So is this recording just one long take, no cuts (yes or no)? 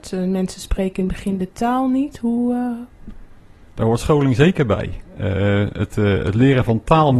yes